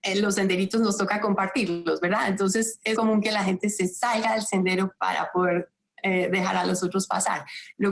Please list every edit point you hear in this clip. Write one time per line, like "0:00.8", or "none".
0:03.0